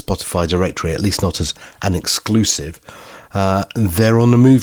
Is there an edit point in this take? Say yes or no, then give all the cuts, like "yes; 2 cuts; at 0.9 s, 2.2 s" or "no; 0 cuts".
no; 0 cuts